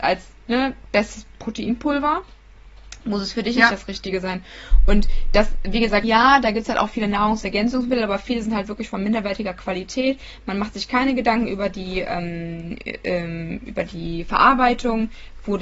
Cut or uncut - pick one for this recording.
cut